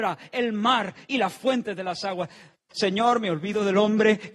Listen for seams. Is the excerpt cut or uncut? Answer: cut